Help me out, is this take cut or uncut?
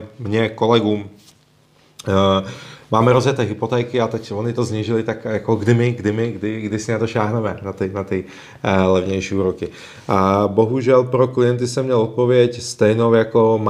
uncut